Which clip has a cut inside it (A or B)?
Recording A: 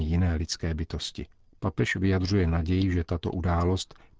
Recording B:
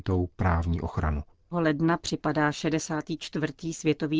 B